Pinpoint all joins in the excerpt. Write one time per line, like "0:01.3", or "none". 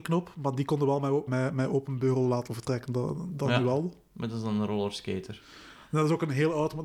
0:01.3